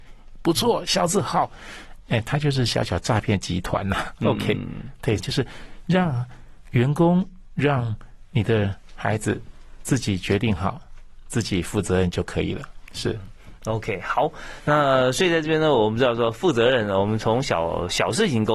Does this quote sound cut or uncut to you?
cut